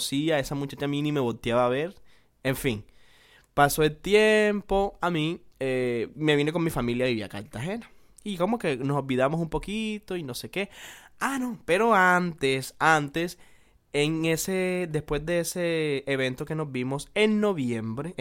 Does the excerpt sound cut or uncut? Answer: cut